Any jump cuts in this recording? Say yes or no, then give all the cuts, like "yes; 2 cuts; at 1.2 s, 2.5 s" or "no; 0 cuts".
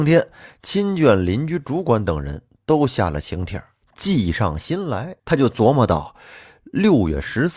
yes; 2 cuts; at 3.8 s, 5.2 s